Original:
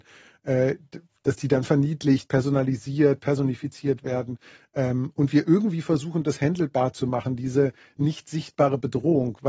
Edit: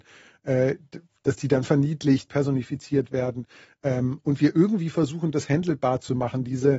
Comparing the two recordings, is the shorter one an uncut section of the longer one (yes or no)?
no